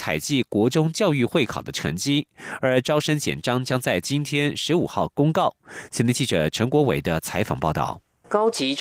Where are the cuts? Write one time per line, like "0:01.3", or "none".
none

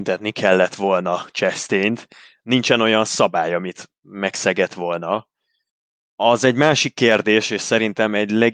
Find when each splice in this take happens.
none

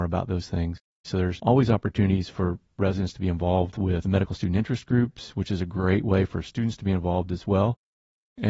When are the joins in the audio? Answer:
0:01.0

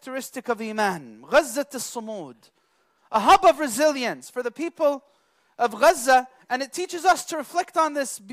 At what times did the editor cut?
0:06.4

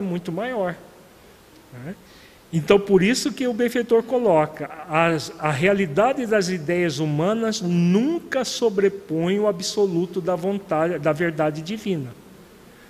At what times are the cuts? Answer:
none

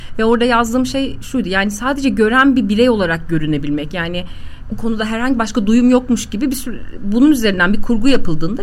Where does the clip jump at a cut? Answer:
0:04.7

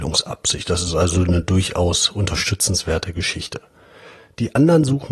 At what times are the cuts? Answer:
none

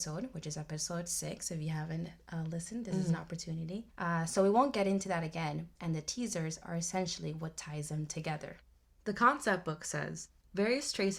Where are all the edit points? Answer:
0:03.9
0:05.8

